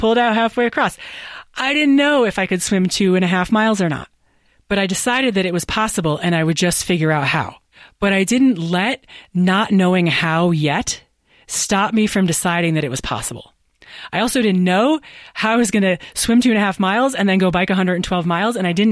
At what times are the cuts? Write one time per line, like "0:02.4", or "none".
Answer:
none